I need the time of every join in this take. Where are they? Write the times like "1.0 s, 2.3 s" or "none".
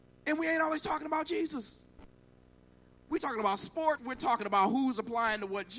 4.0 s